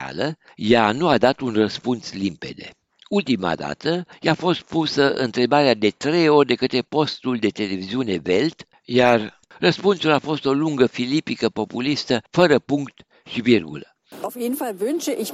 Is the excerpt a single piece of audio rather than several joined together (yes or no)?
yes